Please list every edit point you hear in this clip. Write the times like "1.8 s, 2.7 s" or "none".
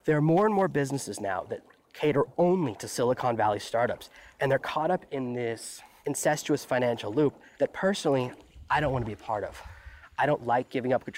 none